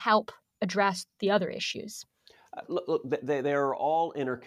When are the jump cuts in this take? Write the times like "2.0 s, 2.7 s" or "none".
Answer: none